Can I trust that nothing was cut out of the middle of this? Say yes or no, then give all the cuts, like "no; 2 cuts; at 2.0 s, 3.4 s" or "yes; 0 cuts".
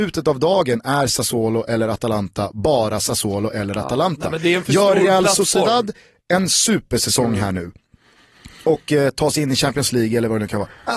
yes; 0 cuts